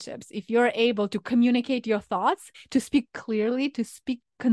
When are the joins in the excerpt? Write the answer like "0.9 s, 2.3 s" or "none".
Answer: 2.5 s